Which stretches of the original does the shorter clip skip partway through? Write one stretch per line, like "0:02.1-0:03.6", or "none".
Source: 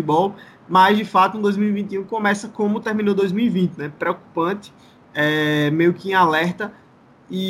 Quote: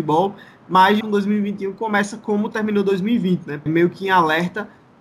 0:01.0-0:01.3
0:04.0-0:05.7